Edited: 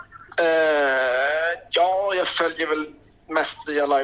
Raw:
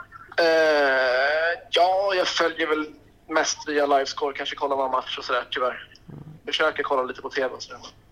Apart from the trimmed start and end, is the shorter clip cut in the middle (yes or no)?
no